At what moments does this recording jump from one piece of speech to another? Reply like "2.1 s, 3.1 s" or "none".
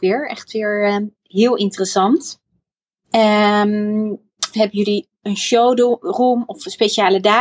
3.0 s, 4.5 s